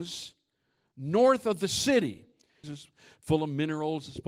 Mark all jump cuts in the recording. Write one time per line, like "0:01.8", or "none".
0:02.6